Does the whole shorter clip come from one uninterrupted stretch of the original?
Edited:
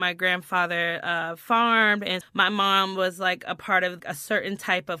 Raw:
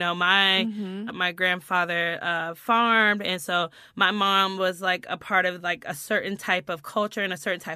no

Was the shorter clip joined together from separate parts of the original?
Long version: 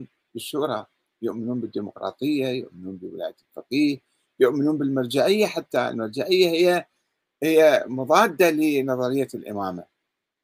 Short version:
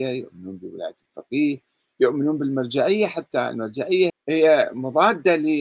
yes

